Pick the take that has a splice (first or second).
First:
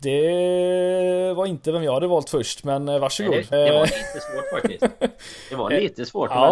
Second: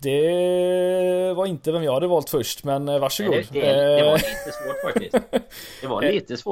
first